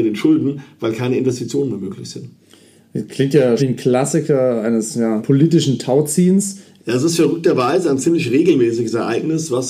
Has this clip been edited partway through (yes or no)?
yes